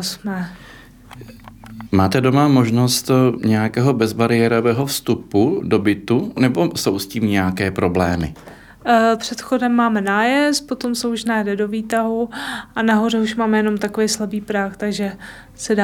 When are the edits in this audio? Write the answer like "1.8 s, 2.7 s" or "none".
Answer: 1.9 s, 9.2 s

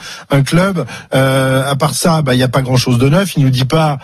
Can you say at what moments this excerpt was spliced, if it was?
1.1 s

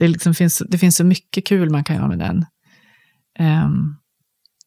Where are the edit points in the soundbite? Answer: none

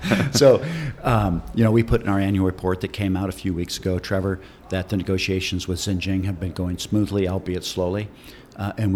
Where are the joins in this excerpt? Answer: none

